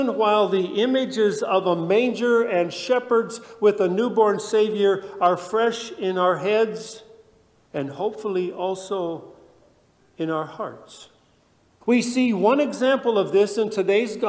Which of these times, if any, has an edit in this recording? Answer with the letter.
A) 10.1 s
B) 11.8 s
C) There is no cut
B